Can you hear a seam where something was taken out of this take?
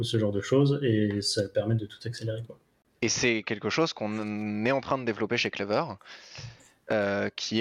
yes; 1 cut; at 2.9 s

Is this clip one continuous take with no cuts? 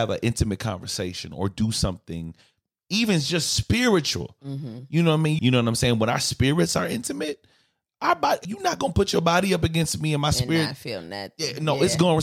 no; 2 cuts; at 5.4 s, 8.4 s

